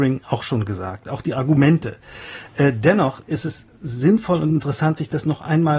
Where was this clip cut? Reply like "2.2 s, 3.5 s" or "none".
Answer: none

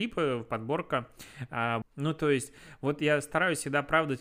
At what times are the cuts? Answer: 1.8 s

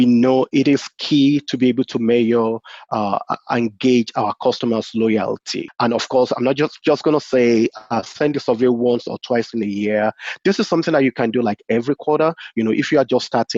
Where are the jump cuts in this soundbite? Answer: 5.7 s

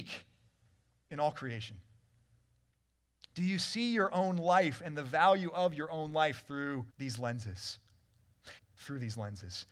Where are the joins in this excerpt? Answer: 6.9 s, 8.6 s

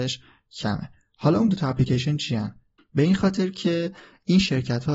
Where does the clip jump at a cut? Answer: 2.8 s

